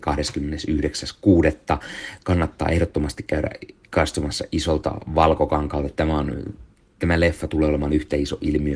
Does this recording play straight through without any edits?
no; 1 cut; at 6.0 s

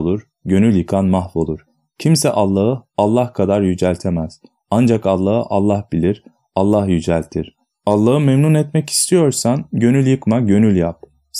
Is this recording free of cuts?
yes; 0 cuts

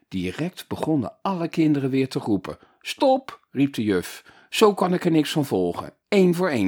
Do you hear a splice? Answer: no; 0 cuts

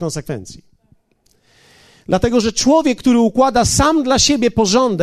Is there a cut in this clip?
no; 0 cuts

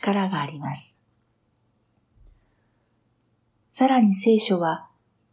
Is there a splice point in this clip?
yes; 1 cut; at 3.5 s

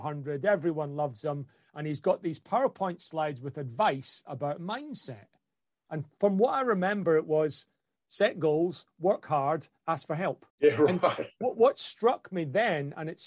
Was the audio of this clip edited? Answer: yes; 1 cut; at 10.5 s

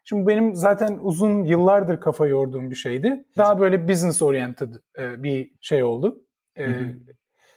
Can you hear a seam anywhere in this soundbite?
yes; 2 cuts; at 3.4 s, 5.6 s

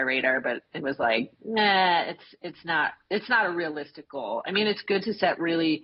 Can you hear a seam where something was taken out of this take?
no; 0 cuts

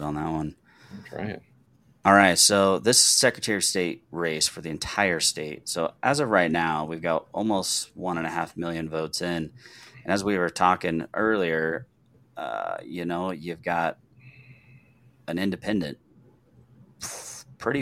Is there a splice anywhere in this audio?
no; 0 cuts

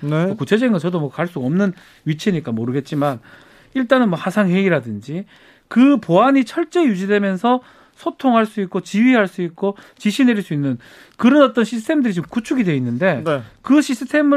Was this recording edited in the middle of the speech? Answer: no; 0 cuts

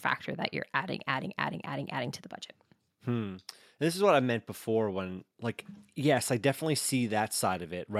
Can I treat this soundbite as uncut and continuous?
yes; 0 cuts

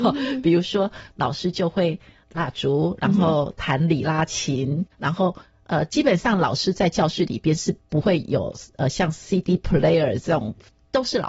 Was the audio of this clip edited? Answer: no; 0 cuts

